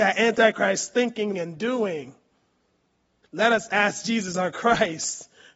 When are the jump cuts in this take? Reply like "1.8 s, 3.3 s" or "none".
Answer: 1.3 s

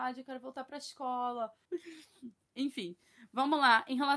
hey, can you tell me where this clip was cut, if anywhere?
1.6 s

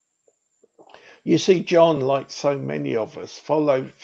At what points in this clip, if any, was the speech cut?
none

